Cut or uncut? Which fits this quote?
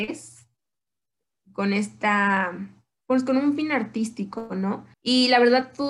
cut